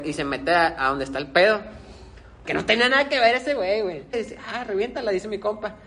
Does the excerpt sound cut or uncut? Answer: cut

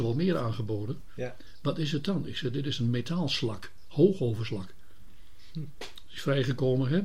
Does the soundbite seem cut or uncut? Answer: uncut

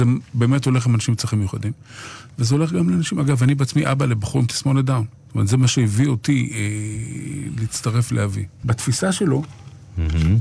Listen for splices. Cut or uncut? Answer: cut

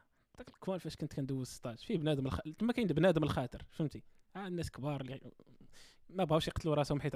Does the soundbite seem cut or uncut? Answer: uncut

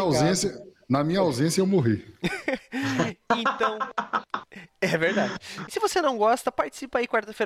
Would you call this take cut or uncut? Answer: cut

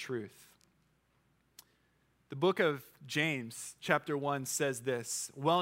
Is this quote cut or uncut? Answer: uncut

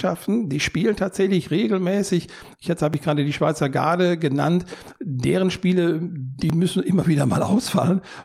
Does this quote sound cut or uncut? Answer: uncut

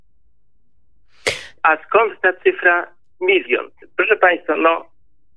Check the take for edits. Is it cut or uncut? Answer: cut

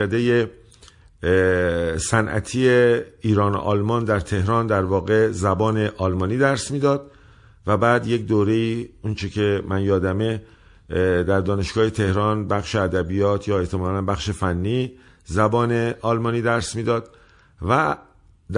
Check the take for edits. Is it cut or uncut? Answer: uncut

